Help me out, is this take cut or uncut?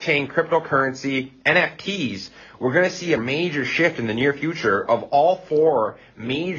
cut